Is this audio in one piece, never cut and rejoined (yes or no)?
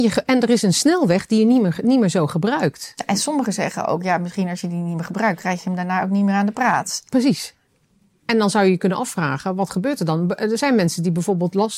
yes